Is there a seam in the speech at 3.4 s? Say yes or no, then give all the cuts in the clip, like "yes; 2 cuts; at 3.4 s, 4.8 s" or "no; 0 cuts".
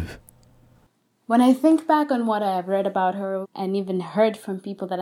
yes; 1 cut; at 3.4 s